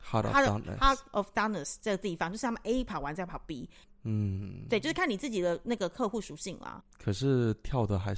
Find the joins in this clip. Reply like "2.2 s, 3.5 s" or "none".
3.8 s, 6.8 s